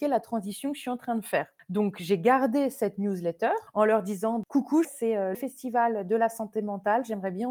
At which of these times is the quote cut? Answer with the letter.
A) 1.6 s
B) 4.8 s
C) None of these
B